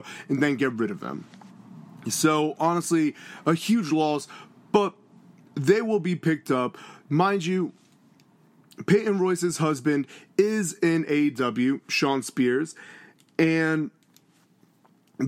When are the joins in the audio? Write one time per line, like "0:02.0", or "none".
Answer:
none